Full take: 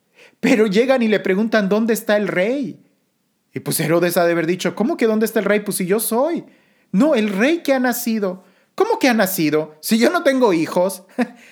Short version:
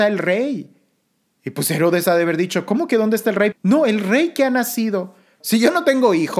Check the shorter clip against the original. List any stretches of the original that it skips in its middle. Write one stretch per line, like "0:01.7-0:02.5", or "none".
0:05.6-0:06.8
0:08.7-0:09.8